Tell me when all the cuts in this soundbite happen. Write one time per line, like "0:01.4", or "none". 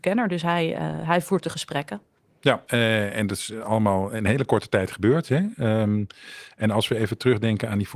0:02.7